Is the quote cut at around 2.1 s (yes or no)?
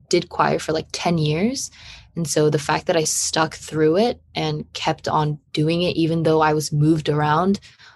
no